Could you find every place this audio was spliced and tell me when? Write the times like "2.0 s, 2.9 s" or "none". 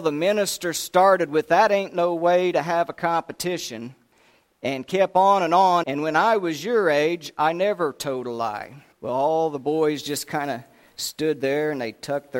5.8 s, 8.9 s